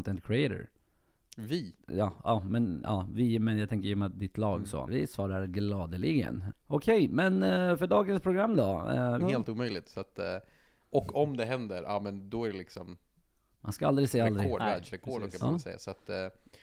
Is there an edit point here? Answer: yes; 3 cuts; at 4.9 s, 6.5 s, 9.2 s

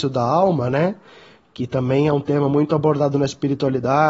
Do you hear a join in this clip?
no; 0 cuts

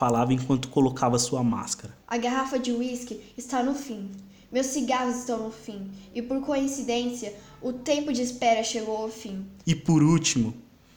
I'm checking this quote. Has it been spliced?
yes; 2 cuts; at 2.0 s, 9.6 s

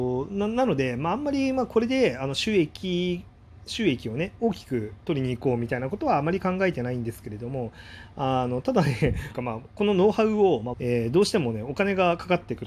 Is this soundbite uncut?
no; 2 cuts; at 9.3 s, 10.7 s

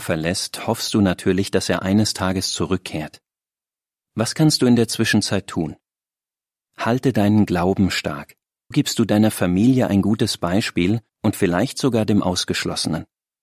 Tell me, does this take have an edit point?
yes; 2 cuts; at 8.7 s, 11.1 s

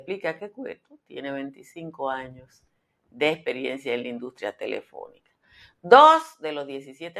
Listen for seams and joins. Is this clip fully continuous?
yes; 0 cuts

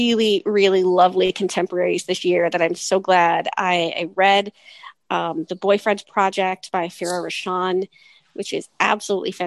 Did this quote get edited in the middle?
no; 0 cuts

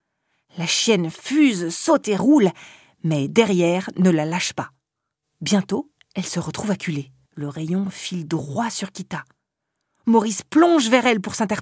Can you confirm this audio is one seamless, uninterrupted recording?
no; 1 cut; at 7.3 s

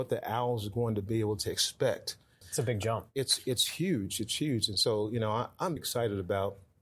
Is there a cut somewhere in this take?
yes; 2 cuts; at 2.4 s, 5.8 s

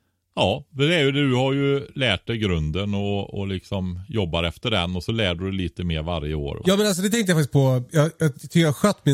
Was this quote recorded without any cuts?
no; 1 cut; at 6.6 s

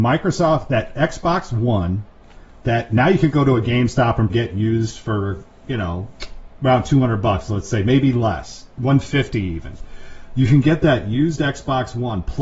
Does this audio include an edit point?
yes; 2 cuts; at 4.3 s, 6.6 s

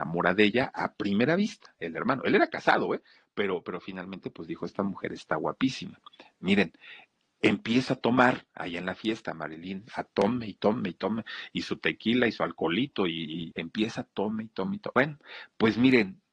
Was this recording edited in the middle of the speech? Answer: yes; 2 cuts; at 13.5 s, 14.9 s

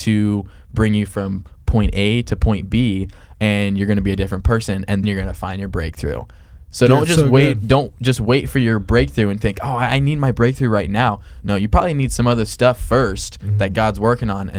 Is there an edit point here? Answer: yes; 1 cut; at 5.0 s

